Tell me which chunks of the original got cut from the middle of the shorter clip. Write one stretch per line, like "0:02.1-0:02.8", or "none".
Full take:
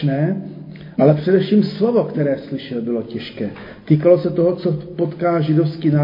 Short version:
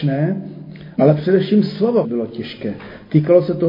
0:02.0-0:02.8